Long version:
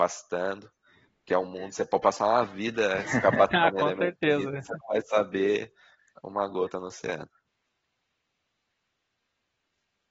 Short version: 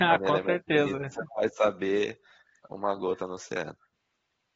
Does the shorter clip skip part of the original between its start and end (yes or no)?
no